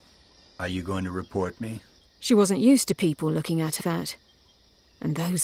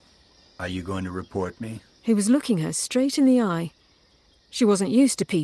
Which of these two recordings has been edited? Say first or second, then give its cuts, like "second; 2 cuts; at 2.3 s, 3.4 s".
first; 2 cuts; at 2.0 s, 3.8 s